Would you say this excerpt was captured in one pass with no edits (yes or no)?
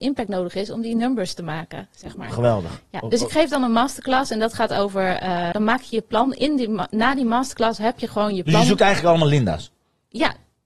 no